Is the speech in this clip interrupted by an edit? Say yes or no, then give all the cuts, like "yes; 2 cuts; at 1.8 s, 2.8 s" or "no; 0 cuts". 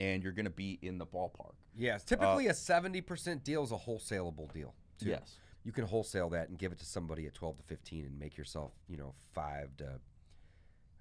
yes; 1 cut; at 5.5 s